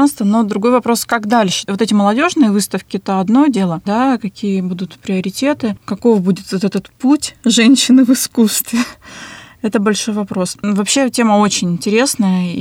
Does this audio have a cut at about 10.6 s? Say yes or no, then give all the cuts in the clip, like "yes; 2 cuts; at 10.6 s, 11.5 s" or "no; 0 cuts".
no; 1 cut; at 3.9 s